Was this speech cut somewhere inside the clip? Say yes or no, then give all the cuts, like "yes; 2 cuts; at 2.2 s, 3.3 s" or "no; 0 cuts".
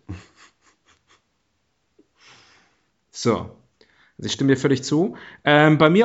no; 0 cuts